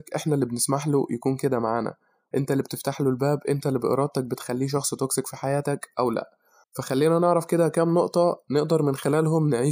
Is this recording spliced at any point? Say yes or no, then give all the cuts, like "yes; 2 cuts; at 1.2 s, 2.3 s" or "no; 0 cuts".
no; 0 cuts